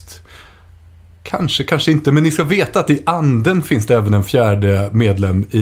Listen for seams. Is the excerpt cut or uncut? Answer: uncut